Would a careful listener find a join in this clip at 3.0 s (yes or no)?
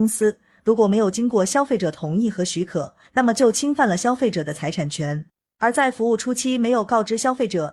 yes